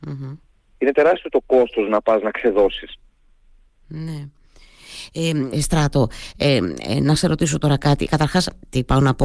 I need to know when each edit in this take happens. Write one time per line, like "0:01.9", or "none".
0:05.5
0:08.1